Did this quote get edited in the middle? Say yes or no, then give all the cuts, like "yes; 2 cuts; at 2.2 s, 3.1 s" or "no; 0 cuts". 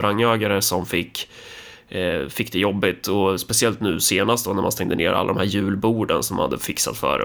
no; 0 cuts